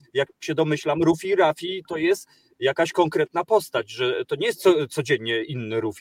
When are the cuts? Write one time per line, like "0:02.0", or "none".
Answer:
0:01.9

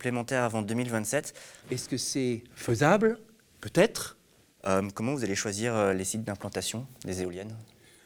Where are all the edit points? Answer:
0:01.6
0:04.6

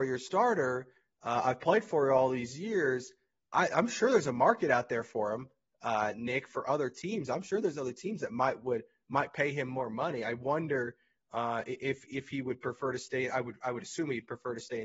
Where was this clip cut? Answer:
none

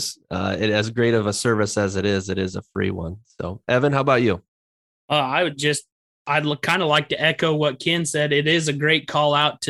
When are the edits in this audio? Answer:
none

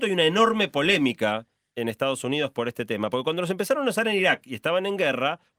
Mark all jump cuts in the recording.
none

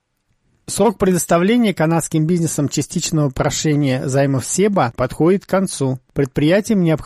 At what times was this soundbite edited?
0:04.9

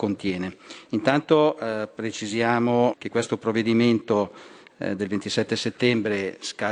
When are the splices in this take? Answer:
0:02.9

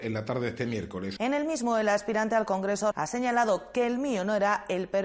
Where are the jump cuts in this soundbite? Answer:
0:01.2
0:02.9

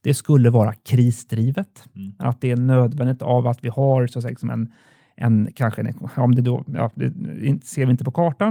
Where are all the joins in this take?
none

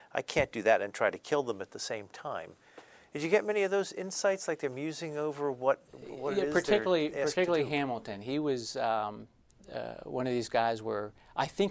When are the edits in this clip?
none

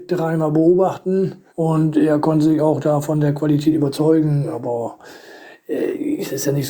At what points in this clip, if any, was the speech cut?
0:01.5

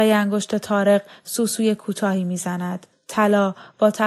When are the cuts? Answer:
0:02.9

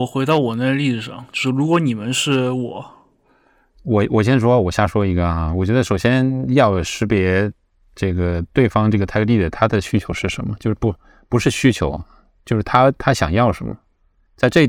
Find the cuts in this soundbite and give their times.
0:03.7

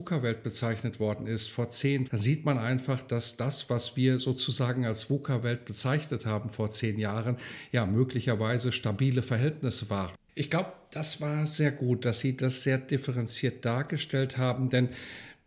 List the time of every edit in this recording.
0:02.1
0:10.1

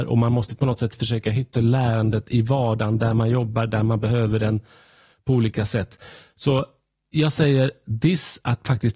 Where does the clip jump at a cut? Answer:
0:01.5

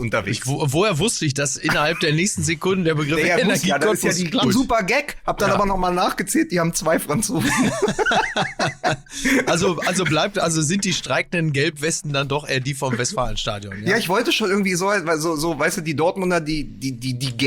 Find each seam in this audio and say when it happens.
0:04.4

